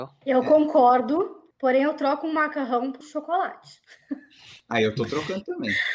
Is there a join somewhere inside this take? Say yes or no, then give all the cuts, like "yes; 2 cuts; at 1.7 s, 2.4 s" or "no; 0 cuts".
yes; 1 cut; at 3.0 s